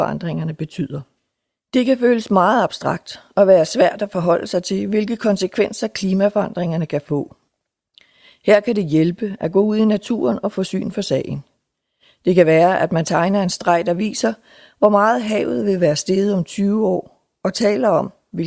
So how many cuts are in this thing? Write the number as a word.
zero